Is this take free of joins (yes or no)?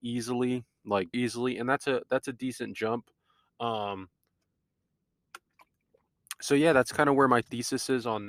no